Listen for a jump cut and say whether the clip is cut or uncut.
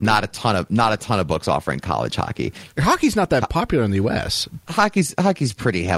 cut